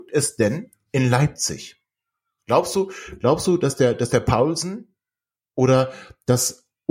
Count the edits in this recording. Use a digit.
0